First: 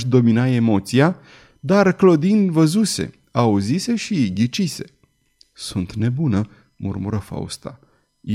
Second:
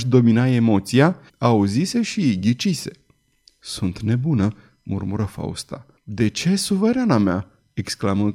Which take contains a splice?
second; 2 cuts; at 1.3 s, 6.0 s

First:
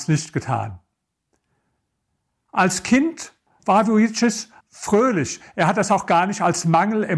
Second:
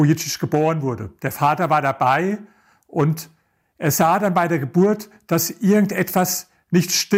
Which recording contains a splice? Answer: first; 1 cut; at 4.6 s

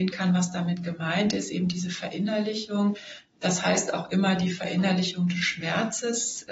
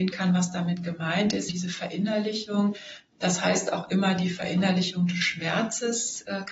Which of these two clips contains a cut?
second; 1 cut; at 1.5 s

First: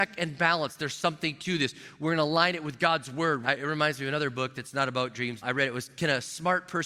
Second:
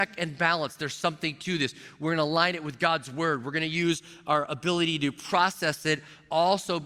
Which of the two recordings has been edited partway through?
first; 2 cuts; at 3.4 s, 5.4 s

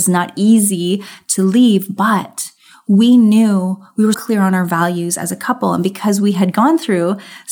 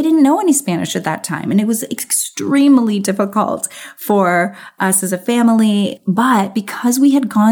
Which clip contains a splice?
first; 1 cut; at 4.1 s

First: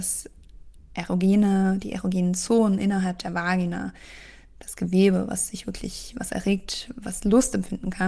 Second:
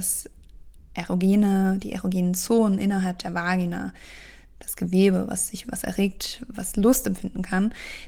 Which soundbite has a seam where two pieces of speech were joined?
second; 1 cut; at 5.6 s

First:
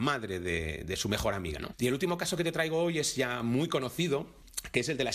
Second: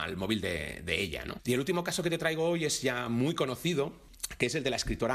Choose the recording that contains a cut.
first; 1 cut; at 1.6 s

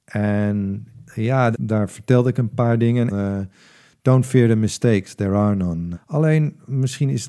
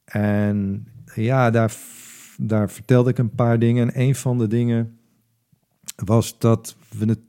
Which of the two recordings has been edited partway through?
first; 3 cuts; at 1.5 s, 3.1 s, 5.9 s

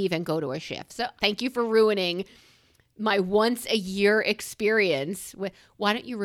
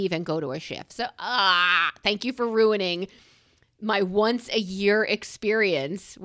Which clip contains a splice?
first; 1 cut; at 1.2 s

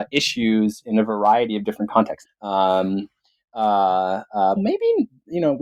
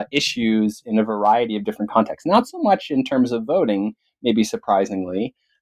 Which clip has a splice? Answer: first; 2 cuts; at 2.2 s, 4.6 s

